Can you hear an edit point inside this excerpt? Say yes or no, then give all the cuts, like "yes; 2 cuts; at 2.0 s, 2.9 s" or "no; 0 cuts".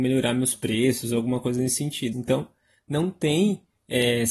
yes; 1 cut; at 2.1 s